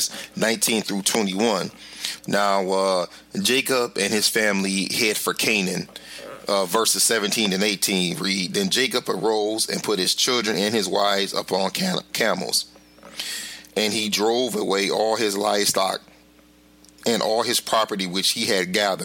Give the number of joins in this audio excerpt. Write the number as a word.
one